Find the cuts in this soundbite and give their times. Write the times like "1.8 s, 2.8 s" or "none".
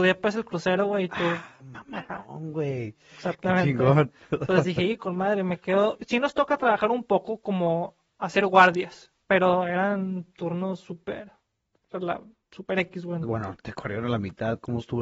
9.2 s, 13.2 s